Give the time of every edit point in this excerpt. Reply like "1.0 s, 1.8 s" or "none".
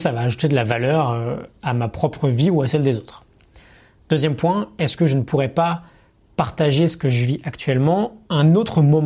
none